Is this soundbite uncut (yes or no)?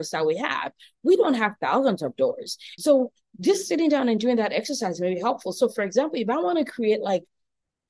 no